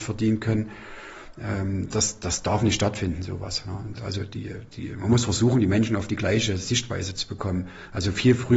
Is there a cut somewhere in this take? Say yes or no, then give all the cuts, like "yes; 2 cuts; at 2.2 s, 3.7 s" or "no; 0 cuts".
yes; 1 cut; at 4.0 s